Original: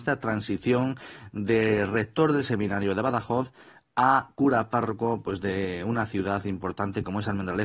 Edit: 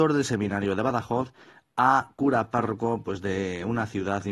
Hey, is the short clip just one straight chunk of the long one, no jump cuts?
yes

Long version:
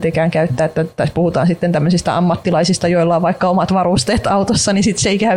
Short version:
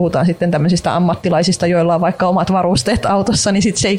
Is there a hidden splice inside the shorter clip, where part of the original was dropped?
no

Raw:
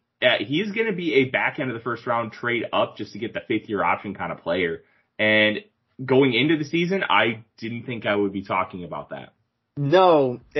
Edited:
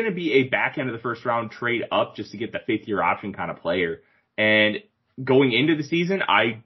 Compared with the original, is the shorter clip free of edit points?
yes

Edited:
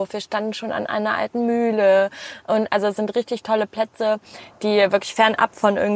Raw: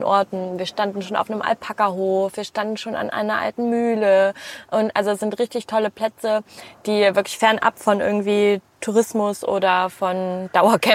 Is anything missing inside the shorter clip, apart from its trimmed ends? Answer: no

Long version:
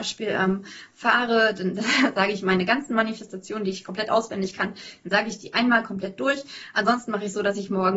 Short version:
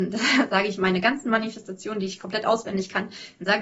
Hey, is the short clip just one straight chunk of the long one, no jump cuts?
yes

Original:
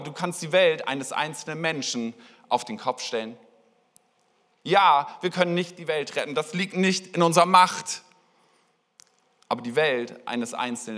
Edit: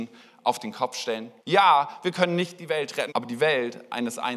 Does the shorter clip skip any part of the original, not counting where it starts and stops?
yes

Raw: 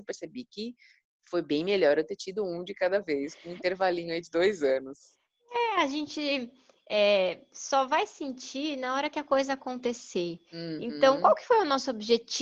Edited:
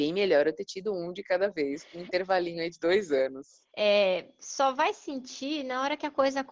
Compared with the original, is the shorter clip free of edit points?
no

